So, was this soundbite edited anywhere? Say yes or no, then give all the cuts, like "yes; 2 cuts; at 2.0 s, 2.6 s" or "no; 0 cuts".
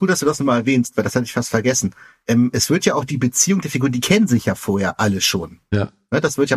no; 0 cuts